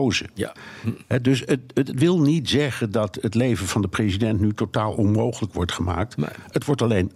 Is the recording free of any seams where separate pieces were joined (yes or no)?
yes